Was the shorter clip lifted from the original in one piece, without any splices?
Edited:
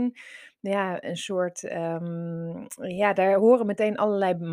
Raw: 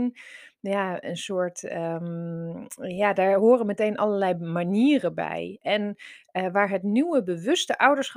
yes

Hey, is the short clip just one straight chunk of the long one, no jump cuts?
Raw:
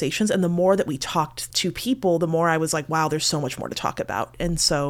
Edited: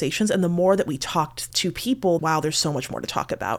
no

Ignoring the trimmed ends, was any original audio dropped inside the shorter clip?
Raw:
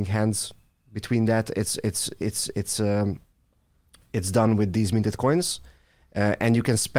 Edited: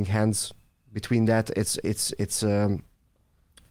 yes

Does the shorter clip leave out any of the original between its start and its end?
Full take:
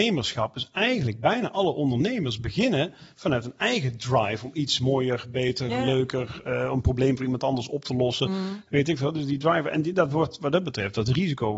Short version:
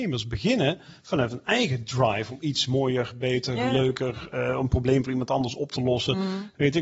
no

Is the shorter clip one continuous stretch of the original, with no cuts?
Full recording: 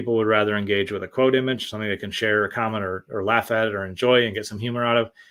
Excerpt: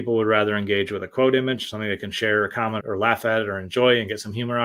no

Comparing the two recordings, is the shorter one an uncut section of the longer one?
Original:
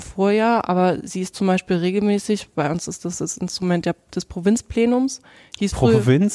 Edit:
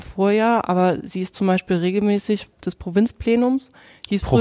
no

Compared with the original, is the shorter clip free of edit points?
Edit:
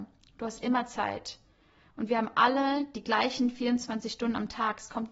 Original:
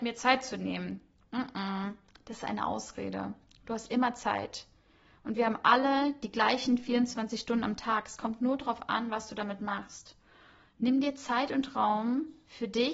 yes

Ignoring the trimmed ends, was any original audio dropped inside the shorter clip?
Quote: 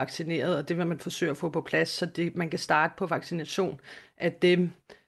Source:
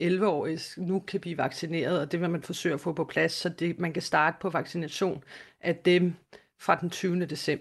no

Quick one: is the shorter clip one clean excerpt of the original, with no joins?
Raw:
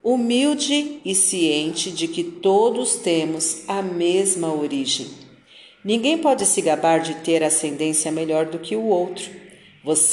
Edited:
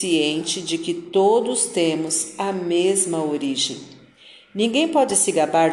yes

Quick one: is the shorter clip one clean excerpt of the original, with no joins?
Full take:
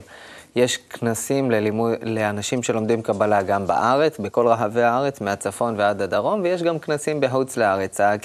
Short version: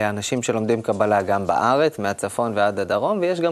no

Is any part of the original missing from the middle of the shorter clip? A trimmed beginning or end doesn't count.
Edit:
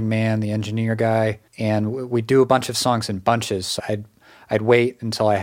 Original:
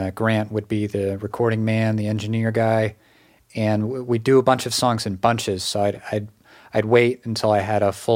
yes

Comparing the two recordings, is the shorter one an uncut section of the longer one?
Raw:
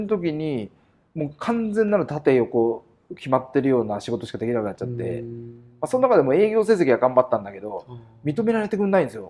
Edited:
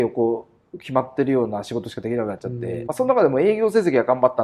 no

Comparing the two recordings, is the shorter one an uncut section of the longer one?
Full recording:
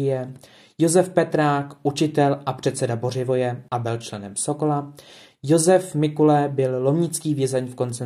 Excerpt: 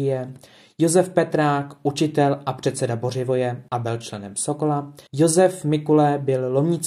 no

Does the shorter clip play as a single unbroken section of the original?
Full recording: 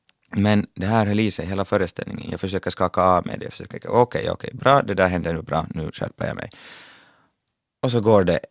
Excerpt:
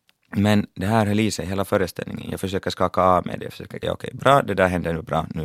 no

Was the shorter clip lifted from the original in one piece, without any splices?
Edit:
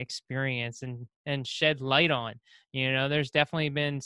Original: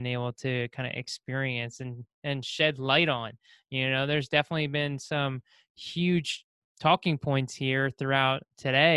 yes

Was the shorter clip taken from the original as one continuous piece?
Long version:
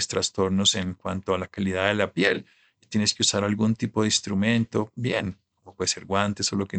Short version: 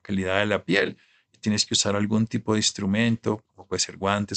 no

